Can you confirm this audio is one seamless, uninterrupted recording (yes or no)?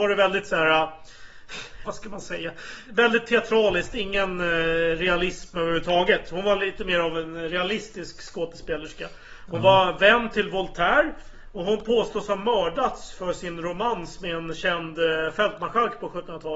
no